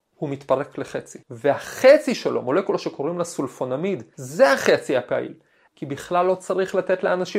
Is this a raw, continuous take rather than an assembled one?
no; 3 cuts; at 1.2 s, 4.1 s, 5.7 s

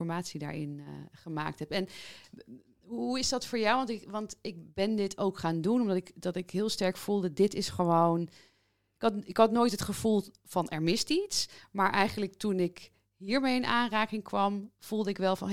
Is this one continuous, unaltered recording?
yes; 0 cuts

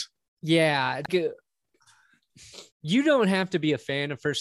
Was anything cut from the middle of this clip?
yes; 2 cuts; at 1.1 s, 2.7 s

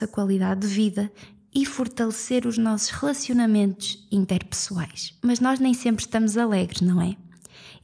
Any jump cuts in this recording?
yes; 1 cut; at 5.2 s

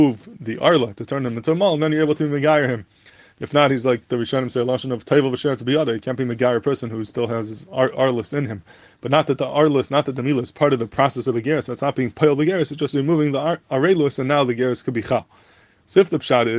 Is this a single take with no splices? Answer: yes; 0 cuts

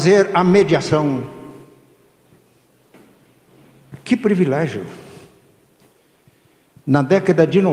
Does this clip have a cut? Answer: no; 0 cuts

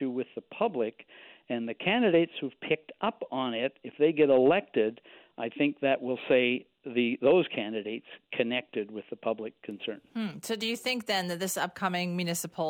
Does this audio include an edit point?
no; 0 cuts

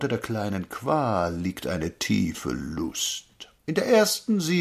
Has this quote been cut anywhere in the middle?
yes; 1 cut; at 3.6 s

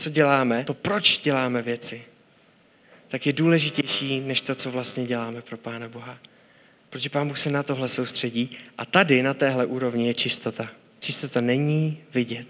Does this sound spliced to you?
no; 0 cuts

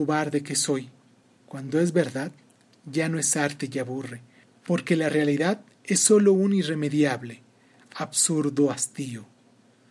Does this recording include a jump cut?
yes; 1 cut; at 1.4 s

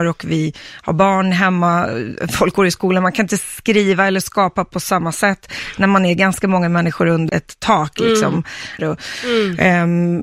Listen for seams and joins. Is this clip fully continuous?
no; 2 cuts; at 7.3 s, 8.8 s

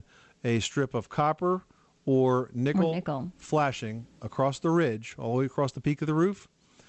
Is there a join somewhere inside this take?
no; 0 cuts

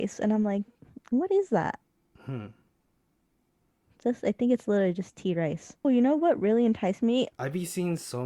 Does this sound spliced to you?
yes; 2 cuts; at 5.8 s, 7.3 s

